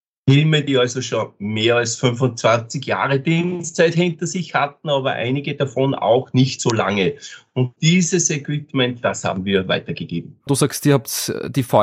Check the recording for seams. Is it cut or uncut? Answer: cut